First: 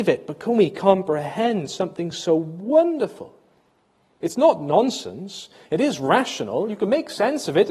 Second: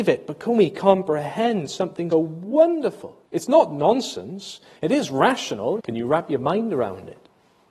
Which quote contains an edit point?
second; 3 cuts; at 2.1 s, 3.3 s, 5.8 s

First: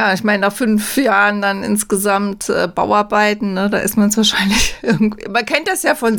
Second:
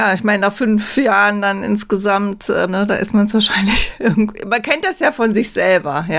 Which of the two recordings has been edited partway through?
second; 1 cut; at 2.7 s

